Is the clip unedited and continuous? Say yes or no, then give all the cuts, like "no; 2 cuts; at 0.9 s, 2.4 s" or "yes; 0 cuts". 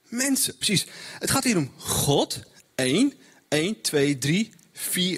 yes; 0 cuts